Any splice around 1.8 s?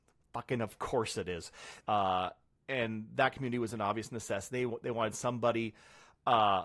yes; 1 cut; at 1.8 s

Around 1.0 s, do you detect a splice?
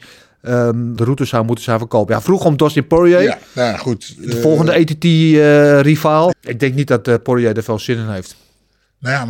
yes; 2 cuts; at 1.0 s, 6.3 s

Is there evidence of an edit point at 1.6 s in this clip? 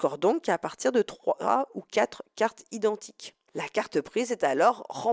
no; 1 cut; at 3.5 s

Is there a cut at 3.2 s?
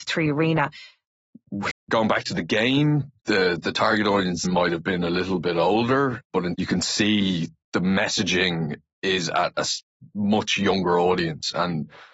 no; 3 cuts; at 1.7 s, 4.5 s, 6.5 s

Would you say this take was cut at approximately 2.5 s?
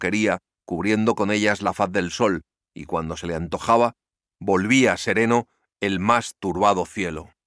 no; 0 cuts

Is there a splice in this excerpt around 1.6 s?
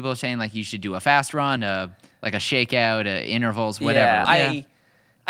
yes; 2 cuts; at 1.6 s, 4.2 s

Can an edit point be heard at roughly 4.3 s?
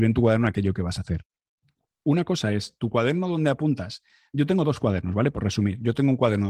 no; 1 cut; at 1.9 s

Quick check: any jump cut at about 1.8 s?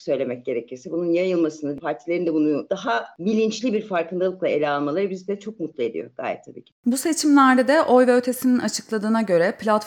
yes; 1 cut; at 1.8 s

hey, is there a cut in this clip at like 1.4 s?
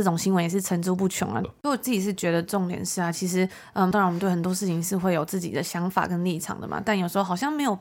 yes; 2 cuts; at 1.4 s, 3.9 s

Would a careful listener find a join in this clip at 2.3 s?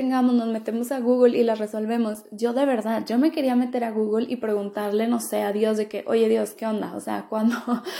no; 0 cuts

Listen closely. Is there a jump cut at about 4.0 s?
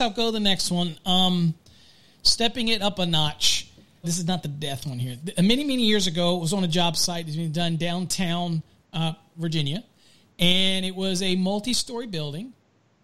yes; 2 cuts; at 4.0 s, 9.3 s

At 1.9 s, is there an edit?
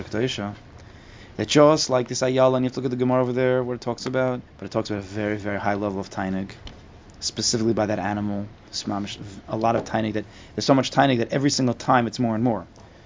no; 1 cut; at 4.5 s

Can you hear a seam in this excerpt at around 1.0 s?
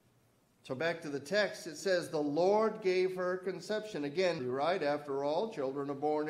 no; 1 cut; at 4.4 s

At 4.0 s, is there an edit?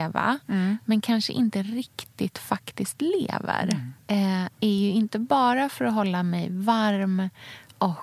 yes; 1 cut; at 4.0 s

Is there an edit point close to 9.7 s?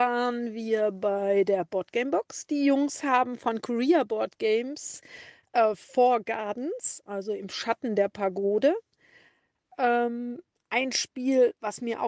no; 0 cuts

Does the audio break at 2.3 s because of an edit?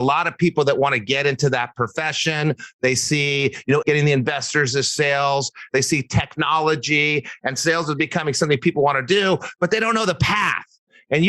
no; 2 cuts; at 3.8 s, 5.7 s

